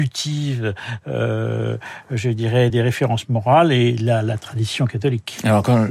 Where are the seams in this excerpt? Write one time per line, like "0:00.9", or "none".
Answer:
0:02.7